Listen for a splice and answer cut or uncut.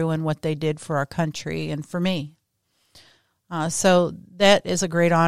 uncut